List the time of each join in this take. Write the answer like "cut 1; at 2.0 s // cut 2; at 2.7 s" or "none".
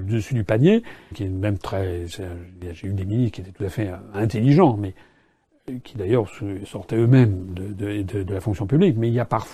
cut 1; at 1.1 s